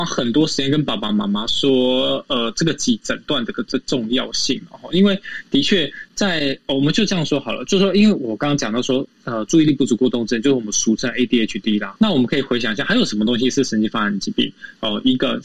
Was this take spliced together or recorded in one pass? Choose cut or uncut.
cut